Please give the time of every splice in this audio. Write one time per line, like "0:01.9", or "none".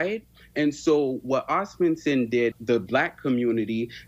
0:02.5